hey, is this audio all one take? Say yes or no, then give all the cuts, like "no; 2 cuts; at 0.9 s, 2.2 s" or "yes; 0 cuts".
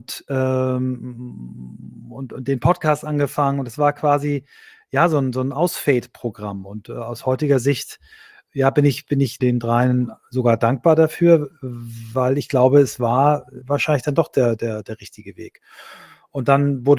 no; 2 cuts; at 9.4 s, 13.6 s